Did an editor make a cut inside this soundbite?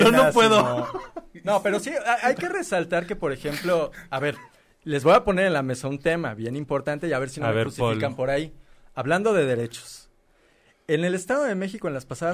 no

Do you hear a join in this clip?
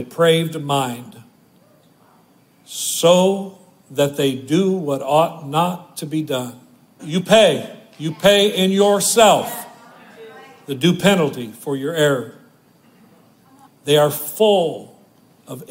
yes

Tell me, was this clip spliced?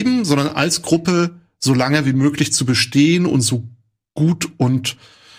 no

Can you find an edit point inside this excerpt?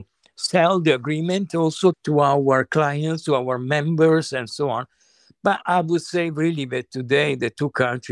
no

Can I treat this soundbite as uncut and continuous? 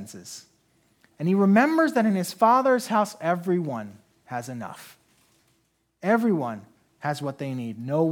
yes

